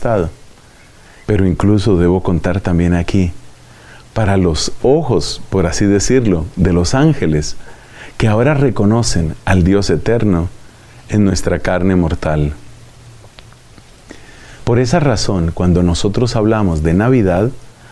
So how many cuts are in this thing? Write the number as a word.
two